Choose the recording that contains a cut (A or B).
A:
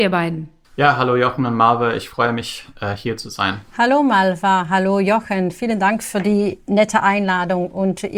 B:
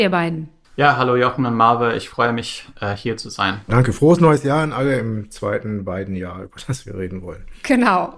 B